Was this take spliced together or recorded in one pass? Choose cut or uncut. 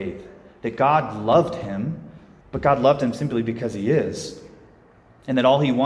cut